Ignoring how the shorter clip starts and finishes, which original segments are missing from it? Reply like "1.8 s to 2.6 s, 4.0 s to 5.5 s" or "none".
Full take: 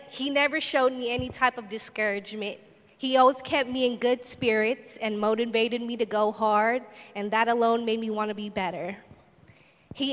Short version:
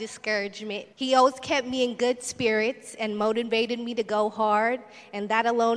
2.6 s to 2.9 s